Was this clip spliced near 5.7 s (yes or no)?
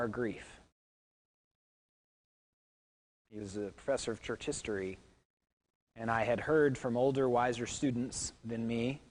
no